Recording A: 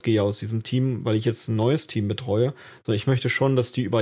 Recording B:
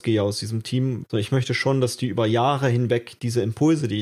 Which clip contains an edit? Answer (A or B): B